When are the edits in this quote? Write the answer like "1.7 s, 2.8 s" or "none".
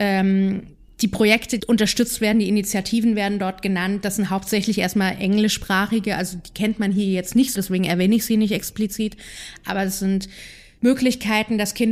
1.6 s, 7.5 s